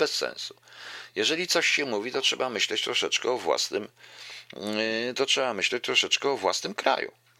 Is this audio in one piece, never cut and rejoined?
yes; 0 cuts

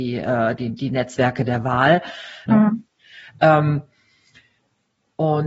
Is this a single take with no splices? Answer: no; 1 cut; at 2.5 s

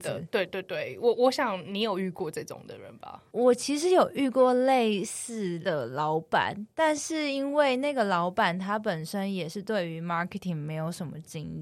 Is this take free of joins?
yes; 0 cuts

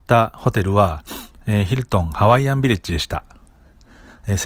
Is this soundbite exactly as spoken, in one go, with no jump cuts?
yes; 0 cuts

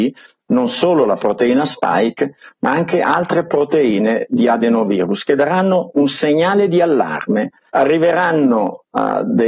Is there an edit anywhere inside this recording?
yes; 1 cut; at 7.7 s

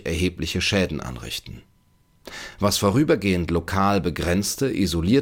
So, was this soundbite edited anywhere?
no; 0 cuts

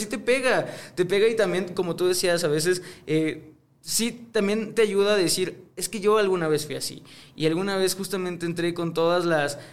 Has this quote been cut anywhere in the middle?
no; 0 cuts

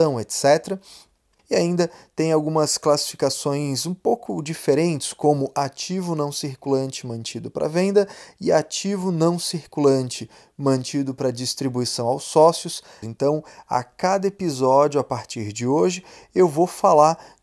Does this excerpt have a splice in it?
yes; 2 cuts; at 1.4 s, 13.0 s

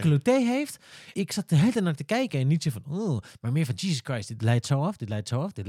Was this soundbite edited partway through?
no; 0 cuts

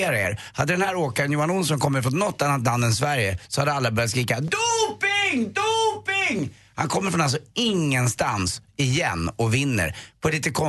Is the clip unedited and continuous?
yes; 0 cuts

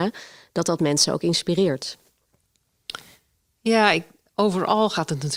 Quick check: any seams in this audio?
no; 0 cuts

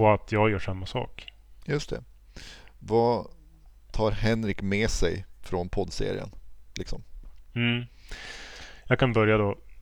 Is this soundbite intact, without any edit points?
yes; 0 cuts

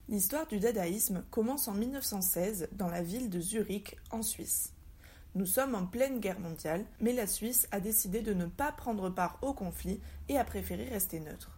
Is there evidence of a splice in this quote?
no; 0 cuts

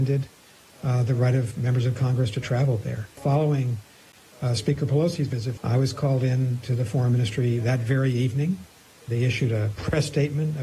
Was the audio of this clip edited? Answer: yes; 2 cuts; at 3.2 s, 5.6 s

